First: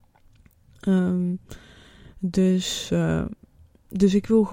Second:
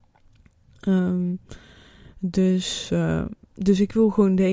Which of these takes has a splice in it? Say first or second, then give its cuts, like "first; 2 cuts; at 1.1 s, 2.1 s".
second; 1 cut; at 3.4 s